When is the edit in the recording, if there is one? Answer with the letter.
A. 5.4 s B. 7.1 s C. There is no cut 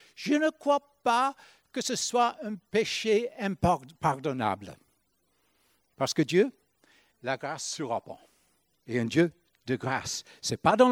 B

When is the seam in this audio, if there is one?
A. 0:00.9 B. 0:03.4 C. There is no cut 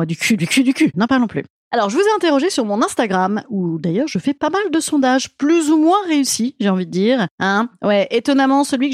A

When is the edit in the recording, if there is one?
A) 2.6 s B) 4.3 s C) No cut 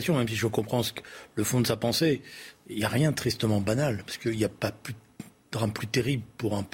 C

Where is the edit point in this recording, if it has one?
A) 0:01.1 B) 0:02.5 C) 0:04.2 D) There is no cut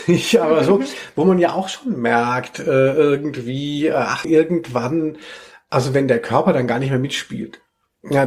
C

